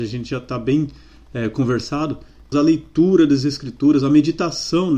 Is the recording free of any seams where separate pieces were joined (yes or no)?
no